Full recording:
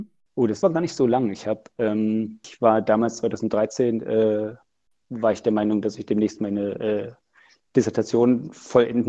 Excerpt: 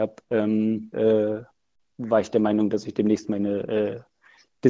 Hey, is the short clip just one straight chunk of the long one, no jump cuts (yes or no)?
no